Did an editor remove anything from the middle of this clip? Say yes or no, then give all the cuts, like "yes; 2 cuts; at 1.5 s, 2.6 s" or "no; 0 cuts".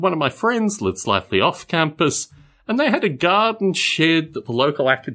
no; 0 cuts